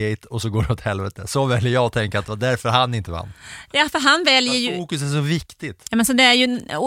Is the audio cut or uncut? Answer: cut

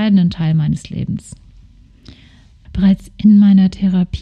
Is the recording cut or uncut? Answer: cut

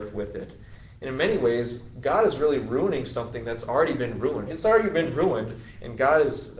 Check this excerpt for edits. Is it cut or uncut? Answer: cut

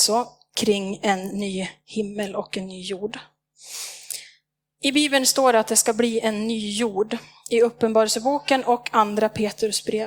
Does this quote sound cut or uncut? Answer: uncut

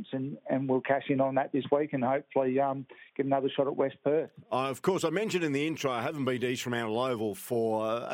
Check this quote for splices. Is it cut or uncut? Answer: uncut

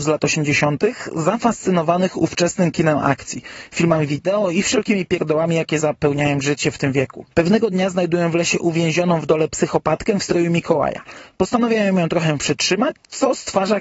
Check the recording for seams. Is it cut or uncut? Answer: uncut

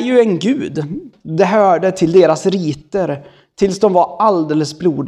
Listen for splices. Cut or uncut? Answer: cut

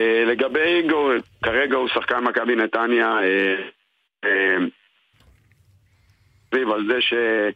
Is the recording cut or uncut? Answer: uncut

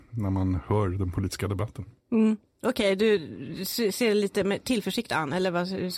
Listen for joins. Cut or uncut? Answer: cut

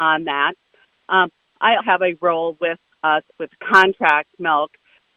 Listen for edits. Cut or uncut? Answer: cut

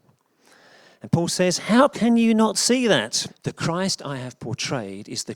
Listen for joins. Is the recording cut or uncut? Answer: cut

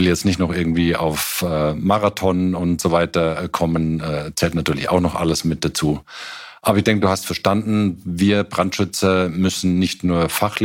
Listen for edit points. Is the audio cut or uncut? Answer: uncut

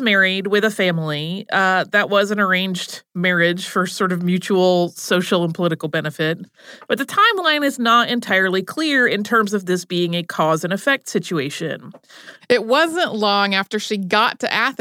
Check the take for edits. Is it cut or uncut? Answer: cut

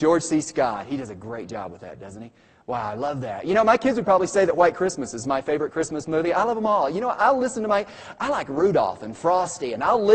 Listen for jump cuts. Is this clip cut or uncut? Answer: uncut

